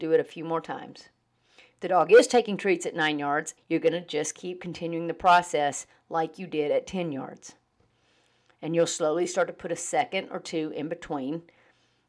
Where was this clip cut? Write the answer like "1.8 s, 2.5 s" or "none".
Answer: 3.6 s